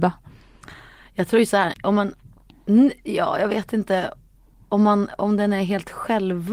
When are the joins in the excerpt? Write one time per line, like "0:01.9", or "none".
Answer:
0:01.7